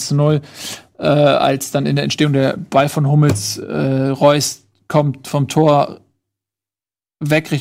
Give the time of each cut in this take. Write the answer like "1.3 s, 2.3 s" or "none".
none